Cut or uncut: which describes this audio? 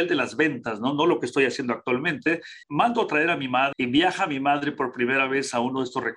cut